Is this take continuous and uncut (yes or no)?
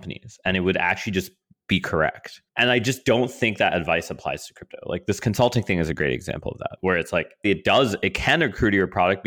no